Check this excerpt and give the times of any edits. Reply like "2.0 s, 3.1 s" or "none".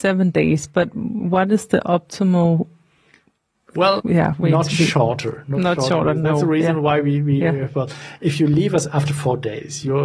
4.0 s